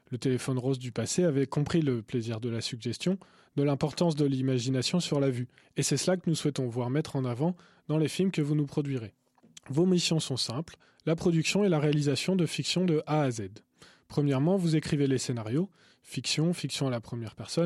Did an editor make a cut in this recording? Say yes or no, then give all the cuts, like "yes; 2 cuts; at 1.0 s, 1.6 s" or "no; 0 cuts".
no; 0 cuts